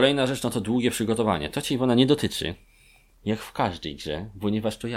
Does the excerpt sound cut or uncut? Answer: uncut